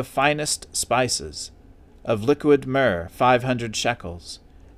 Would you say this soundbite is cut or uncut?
uncut